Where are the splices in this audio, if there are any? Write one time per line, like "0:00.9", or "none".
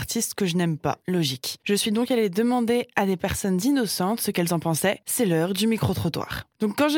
none

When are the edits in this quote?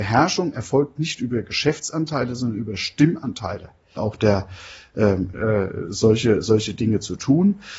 0:04.0
0:05.3

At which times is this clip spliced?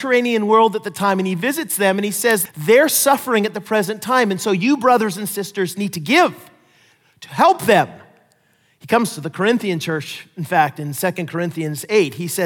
0:02.5

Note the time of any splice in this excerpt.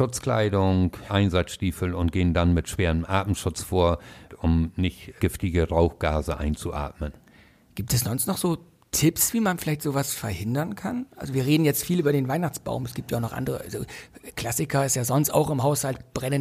0:01.1
0:04.3

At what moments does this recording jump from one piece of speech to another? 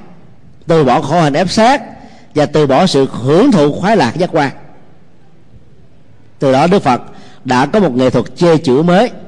none

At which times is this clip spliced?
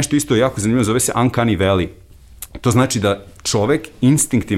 none

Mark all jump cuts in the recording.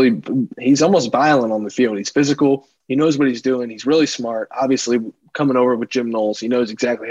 none

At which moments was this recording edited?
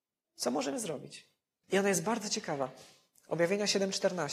0:01.6

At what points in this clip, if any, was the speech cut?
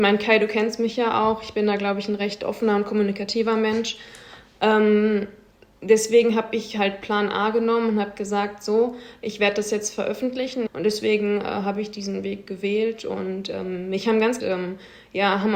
0:10.7
0:14.4

